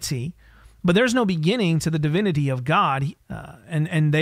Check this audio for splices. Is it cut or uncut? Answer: cut